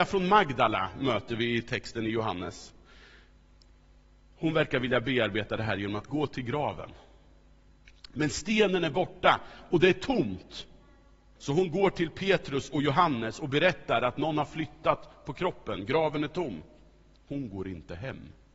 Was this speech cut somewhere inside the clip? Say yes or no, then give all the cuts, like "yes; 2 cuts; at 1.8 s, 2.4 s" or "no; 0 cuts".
yes; 2 cuts; at 11.4 s, 17.3 s